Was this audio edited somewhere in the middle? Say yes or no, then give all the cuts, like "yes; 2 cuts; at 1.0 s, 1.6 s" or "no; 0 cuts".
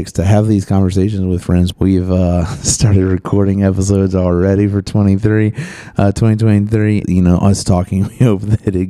yes; 2 cuts; at 1.7 s, 7.0 s